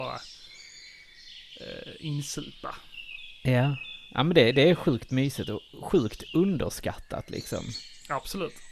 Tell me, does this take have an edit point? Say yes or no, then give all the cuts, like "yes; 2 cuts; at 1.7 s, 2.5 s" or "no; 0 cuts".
no; 0 cuts